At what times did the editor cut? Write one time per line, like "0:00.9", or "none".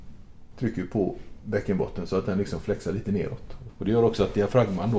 0:03.7